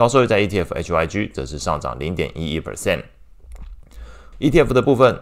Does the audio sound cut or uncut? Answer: cut